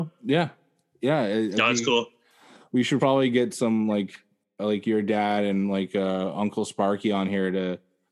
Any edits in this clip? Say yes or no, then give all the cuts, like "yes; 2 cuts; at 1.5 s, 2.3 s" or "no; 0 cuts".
no; 0 cuts